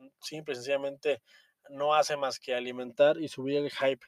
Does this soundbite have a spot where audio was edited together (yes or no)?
no